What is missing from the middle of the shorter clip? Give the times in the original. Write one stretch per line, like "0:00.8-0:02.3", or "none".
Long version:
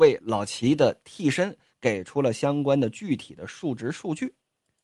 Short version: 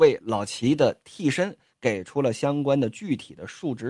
none

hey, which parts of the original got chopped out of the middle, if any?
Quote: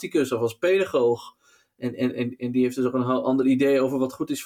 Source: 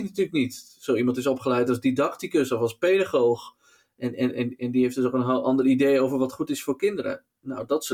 none

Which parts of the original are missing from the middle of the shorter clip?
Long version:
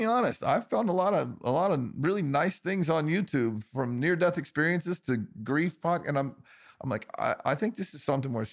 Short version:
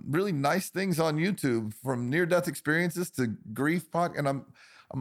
none

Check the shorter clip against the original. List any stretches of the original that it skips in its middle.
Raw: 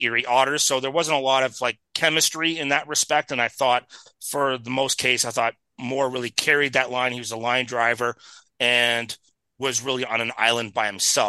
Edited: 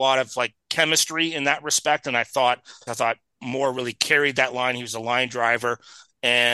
0:04.1-0:05.2

